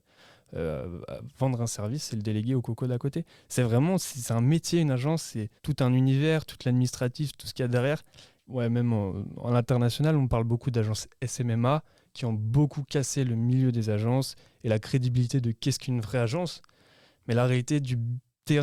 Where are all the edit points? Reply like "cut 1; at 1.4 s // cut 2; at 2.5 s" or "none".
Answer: cut 1; at 5.6 s // cut 2; at 8.4 s